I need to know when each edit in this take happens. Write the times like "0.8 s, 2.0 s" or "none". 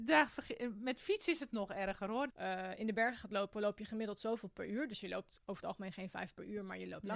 2.3 s